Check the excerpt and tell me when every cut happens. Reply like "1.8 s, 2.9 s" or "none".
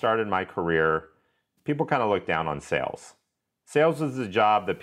1.6 s